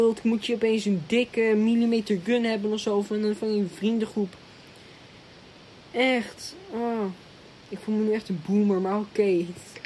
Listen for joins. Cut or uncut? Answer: uncut